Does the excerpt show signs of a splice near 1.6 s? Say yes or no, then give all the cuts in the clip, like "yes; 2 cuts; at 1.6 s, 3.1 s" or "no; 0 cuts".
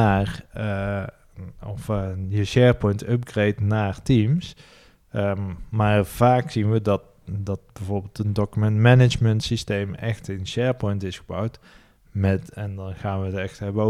no; 0 cuts